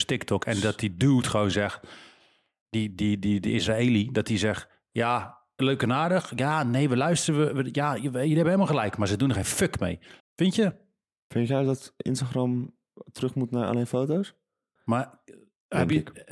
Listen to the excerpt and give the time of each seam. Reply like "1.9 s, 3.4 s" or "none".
5.6 s, 10.2 s, 14.8 s